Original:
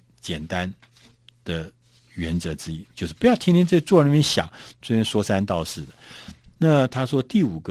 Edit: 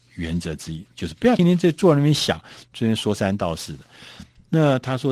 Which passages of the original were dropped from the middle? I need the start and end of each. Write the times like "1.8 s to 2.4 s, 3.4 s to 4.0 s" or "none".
3.4 s to 3.5 s